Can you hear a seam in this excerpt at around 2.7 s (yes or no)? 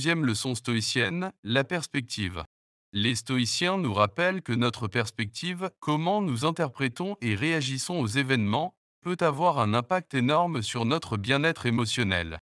no